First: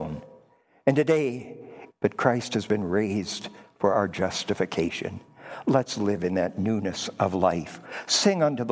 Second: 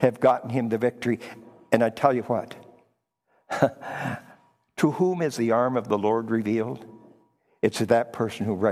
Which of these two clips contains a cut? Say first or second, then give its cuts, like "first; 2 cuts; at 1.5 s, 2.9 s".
first; 1 cut; at 1.9 s